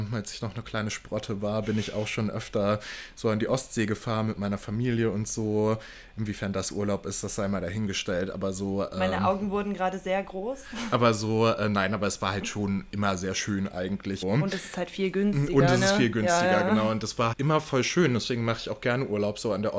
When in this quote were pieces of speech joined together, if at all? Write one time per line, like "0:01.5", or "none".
0:14.2
0:17.3